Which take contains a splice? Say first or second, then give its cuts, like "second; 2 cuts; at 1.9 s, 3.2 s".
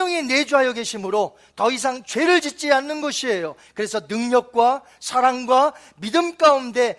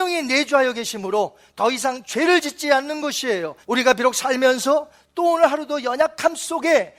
second; 1 cut; at 3.6 s